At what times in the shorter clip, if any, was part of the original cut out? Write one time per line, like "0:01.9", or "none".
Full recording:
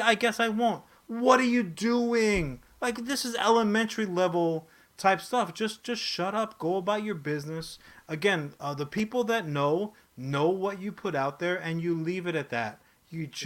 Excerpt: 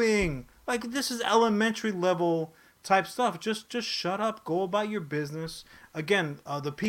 none